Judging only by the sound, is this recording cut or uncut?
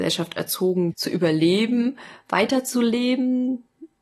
cut